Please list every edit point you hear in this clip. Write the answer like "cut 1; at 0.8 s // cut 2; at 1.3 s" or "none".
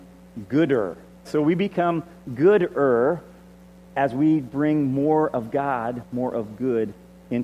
cut 1; at 1.2 s